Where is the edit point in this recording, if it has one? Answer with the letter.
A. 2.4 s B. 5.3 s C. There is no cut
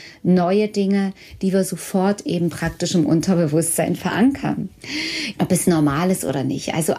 B